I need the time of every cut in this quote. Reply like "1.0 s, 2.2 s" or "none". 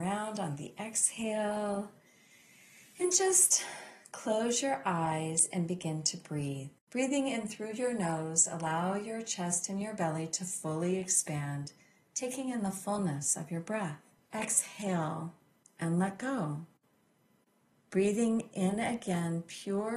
6.8 s, 14.2 s, 17.7 s